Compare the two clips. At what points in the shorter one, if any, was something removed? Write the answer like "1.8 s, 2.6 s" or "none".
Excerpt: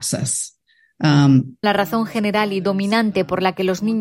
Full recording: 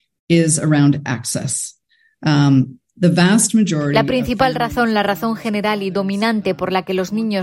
1.6 s